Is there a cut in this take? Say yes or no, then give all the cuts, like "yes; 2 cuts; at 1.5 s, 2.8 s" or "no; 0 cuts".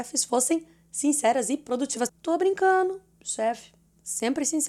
yes; 1 cut; at 2.1 s